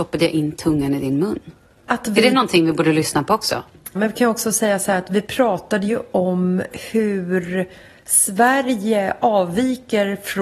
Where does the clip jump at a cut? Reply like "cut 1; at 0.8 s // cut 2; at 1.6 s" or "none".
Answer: cut 1; at 1.9 s // cut 2; at 3.9 s